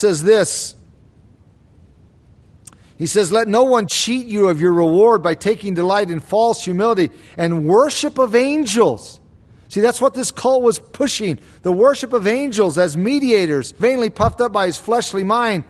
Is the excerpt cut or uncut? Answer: cut